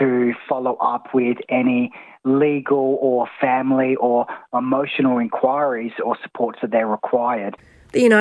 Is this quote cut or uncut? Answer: uncut